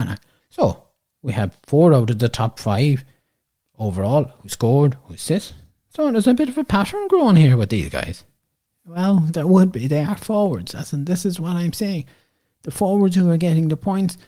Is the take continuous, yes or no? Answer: yes